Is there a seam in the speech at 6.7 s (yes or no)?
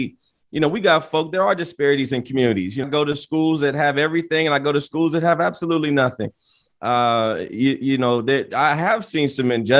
no